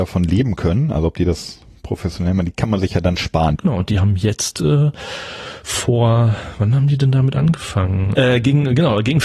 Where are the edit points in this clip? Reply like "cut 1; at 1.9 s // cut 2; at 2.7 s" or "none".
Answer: cut 1; at 3.6 s // cut 2; at 8.1 s

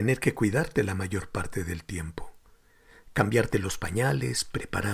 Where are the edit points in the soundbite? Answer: none

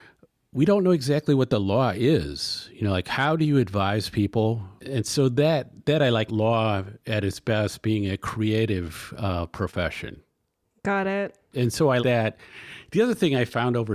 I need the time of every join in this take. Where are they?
cut 1; at 4.8 s // cut 2; at 6.3 s // cut 3; at 12.0 s

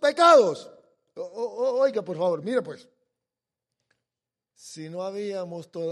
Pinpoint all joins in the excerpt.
cut 1; at 2.4 s

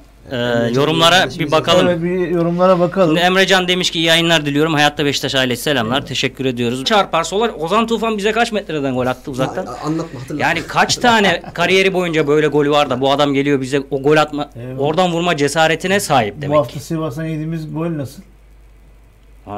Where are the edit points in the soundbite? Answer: cut 1; at 6.8 s

